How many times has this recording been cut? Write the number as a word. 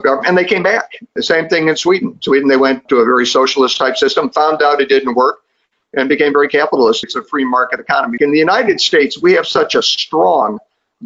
two